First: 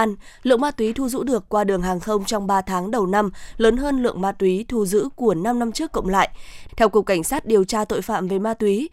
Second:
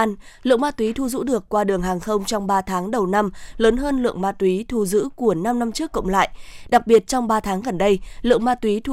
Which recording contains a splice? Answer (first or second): first